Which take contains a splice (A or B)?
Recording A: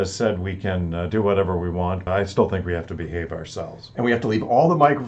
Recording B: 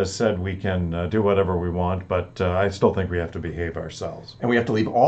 A